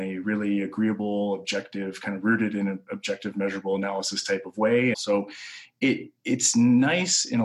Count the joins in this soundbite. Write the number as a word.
one